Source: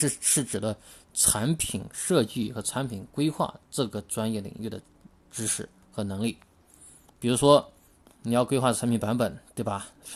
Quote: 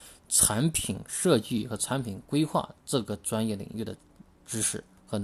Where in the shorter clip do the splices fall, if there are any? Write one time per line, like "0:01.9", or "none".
none